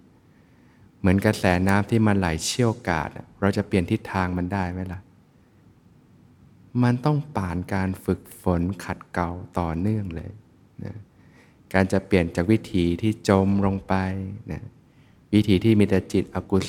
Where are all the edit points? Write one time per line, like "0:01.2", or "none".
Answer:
none